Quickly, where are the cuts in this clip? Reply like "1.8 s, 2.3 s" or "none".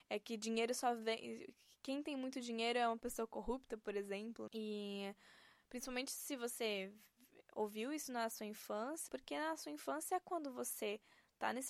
4.5 s, 9.1 s